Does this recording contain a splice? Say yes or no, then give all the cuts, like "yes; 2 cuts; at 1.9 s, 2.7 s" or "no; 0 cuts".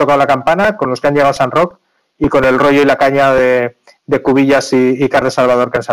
no; 0 cuts